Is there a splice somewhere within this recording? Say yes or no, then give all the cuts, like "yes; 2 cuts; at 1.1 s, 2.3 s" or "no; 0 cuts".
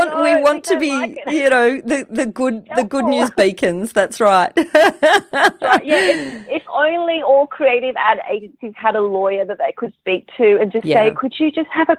no; 0 cuts